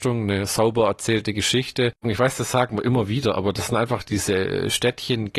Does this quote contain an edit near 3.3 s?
no; 1 cut; at 2.0 s

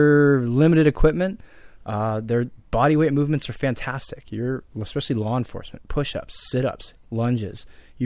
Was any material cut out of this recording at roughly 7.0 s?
yes; 1 cut; at 7.0 s

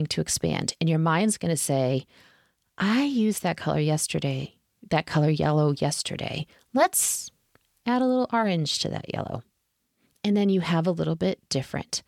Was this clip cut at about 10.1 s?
yes; 1 cut; at 10.1 s

